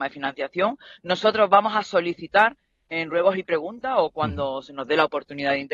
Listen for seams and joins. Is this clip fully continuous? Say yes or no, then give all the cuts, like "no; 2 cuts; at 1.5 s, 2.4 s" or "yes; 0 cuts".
yes; 0 cuts